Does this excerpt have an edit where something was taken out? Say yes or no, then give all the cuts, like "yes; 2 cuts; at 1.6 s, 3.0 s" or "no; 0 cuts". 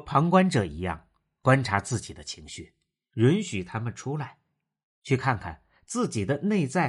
no; 0 cuts